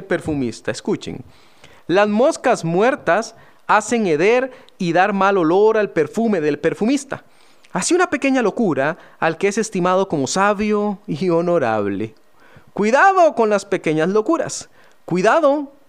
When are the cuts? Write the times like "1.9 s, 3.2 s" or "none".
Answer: none

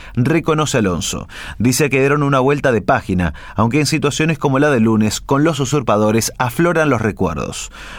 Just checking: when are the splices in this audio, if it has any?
none

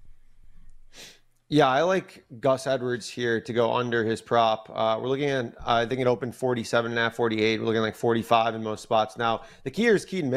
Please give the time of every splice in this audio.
none

